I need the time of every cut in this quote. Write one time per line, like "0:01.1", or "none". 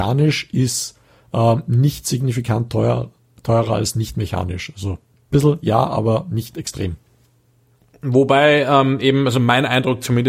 none